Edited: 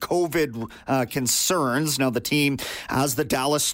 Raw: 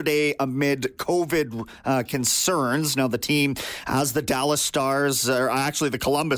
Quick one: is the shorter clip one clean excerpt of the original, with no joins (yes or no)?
yes